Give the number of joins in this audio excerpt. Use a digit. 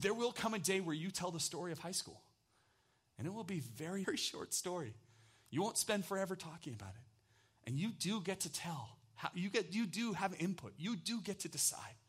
1